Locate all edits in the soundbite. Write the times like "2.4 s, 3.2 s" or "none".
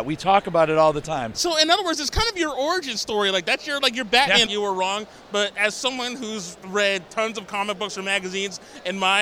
4.5 s